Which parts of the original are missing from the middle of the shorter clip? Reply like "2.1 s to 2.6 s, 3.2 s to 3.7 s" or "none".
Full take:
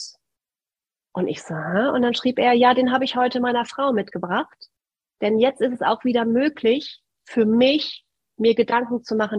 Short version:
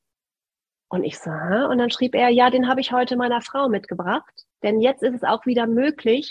4.7 s to 5.1 s